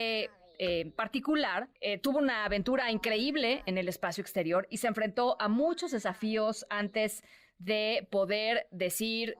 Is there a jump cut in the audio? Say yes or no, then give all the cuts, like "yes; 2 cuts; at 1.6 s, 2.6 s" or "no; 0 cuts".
yes; 2 cuts; at 1.8 s, 4.7 s